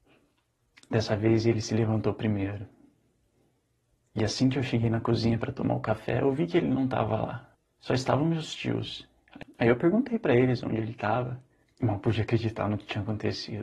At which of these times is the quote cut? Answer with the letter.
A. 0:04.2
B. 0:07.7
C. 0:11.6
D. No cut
C